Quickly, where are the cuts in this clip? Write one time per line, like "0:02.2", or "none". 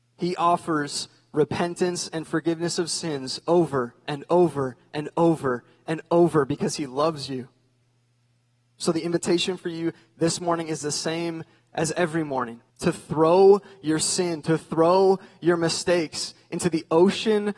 0:12.7

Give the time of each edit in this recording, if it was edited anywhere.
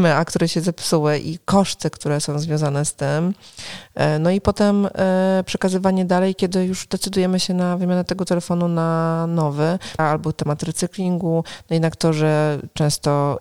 0:10.0

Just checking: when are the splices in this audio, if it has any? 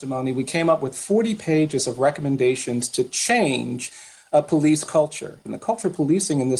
0:05.4

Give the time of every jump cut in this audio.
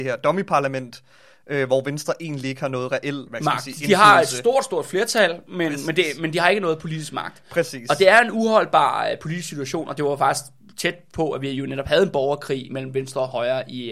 none

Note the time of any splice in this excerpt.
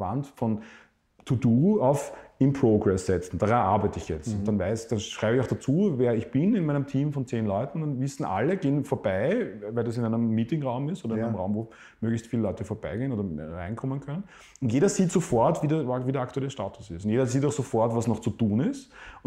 none

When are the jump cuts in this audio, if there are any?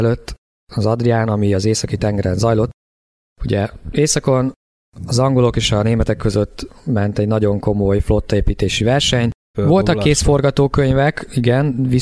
0:09.5

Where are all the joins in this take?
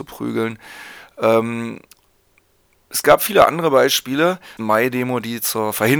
0:04.6

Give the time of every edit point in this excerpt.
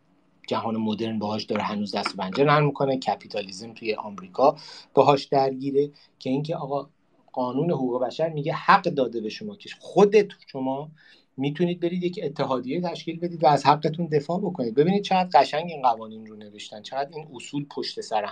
none

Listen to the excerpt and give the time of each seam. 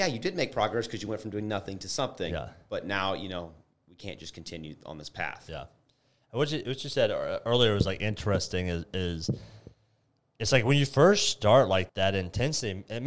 0:10.2
0:11.9

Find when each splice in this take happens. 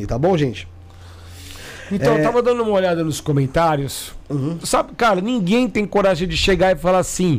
0:04.6

